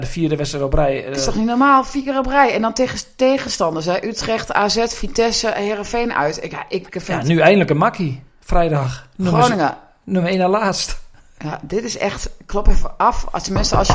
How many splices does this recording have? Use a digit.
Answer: 1